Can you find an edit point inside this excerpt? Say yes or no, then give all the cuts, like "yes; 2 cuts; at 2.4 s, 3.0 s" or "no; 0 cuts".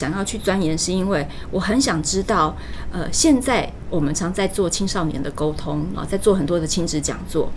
yes; 2 cuts; at 4.1 s, 5.9 s